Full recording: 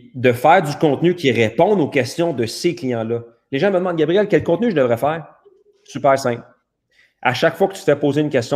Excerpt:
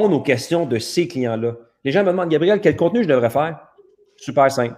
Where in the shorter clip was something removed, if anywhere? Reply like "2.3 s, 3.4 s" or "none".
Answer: none